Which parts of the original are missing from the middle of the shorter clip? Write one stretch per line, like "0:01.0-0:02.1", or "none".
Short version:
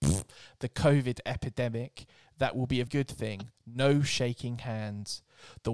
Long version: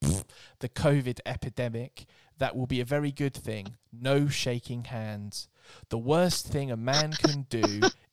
0:02.9-0:03.1